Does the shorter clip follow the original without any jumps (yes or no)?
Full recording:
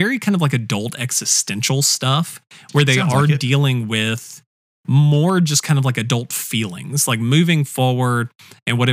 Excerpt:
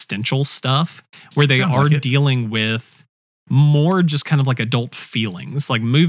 yes